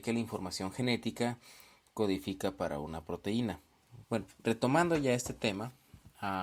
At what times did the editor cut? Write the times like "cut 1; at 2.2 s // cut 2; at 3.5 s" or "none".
cut 1; at 4.0 s